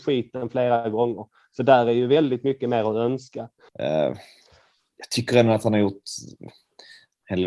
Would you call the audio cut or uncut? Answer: cut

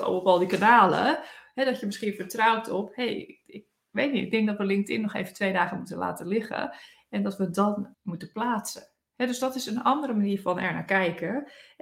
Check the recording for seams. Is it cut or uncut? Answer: cut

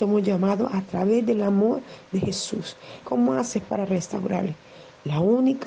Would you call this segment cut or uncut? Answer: cut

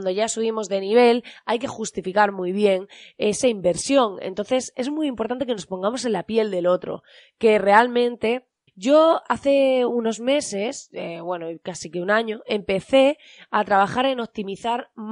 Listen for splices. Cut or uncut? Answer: cut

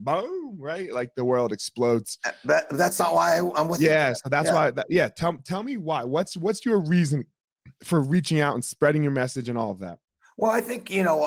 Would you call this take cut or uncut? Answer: uncut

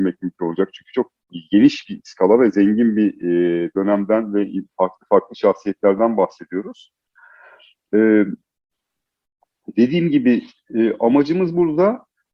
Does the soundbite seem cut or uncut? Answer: uncut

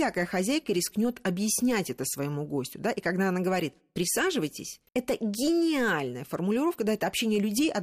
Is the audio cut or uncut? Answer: cut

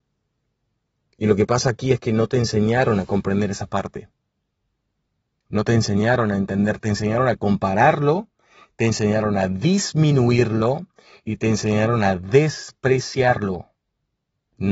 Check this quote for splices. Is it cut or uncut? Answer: uncut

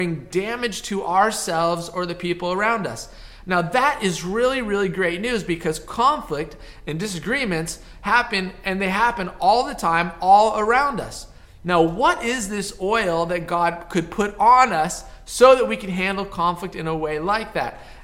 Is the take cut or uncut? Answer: uncut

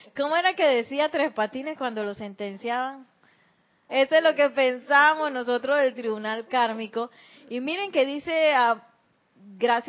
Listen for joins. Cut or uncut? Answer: cut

